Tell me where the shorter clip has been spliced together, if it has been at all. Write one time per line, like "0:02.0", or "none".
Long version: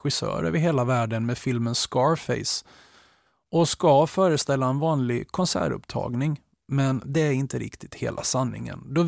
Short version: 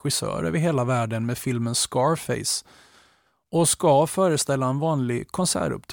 none